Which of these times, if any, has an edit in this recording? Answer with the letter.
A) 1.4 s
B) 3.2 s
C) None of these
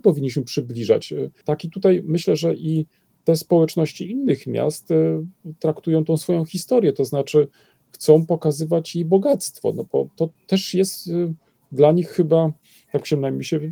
A